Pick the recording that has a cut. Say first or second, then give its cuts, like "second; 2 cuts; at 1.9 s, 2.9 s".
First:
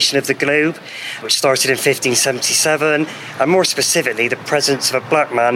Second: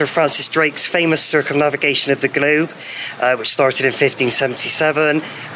first; 1 cut; at 1.2 s